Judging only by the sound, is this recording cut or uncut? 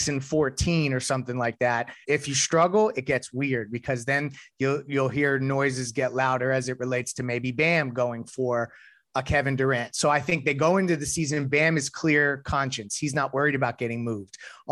cut